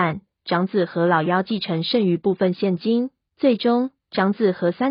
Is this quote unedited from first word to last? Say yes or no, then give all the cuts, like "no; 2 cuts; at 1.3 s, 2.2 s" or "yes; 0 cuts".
no; 1 cut; at 3.3 s